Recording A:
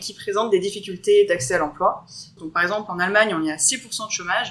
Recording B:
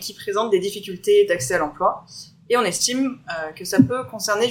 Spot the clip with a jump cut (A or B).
A